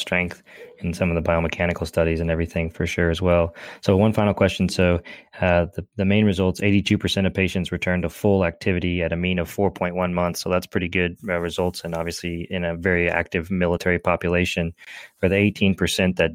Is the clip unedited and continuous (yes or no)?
yes